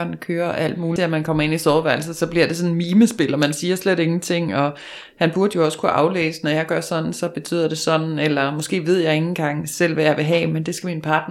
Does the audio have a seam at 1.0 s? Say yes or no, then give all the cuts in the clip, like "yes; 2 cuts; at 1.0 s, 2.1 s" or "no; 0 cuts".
yes; 1 cut; at 1.0 s